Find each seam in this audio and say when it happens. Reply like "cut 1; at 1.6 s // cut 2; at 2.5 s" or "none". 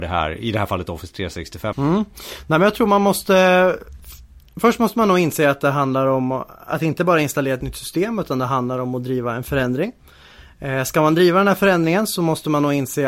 cut 1; at 1.7 s